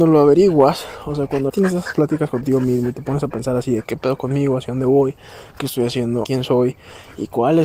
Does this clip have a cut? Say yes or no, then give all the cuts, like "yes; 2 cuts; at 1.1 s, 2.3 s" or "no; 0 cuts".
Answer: yes; 2 cuts; at 1.5 s, 6.2 s